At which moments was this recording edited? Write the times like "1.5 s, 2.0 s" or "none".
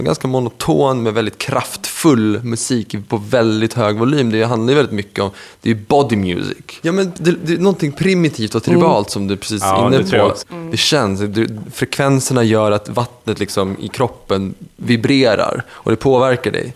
6.8 s, 10.4 s, 11.6 s